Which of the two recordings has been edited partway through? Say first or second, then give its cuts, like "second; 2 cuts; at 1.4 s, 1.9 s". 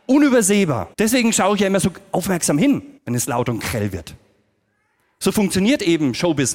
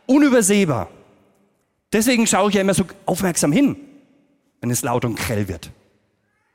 first; 2 cuts; at 0.9 s, 3.0 s